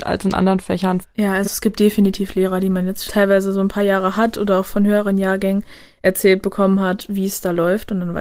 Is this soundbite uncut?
no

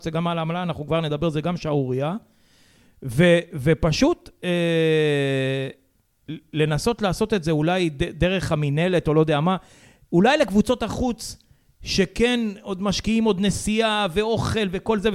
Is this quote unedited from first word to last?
yes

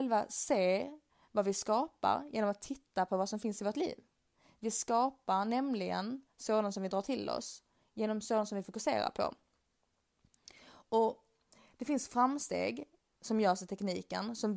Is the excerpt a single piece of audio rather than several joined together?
yes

